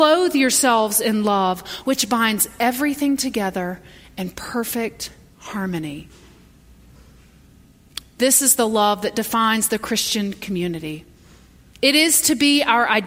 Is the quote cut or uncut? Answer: uncut